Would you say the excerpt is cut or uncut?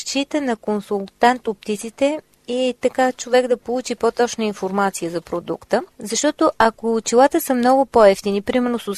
uncut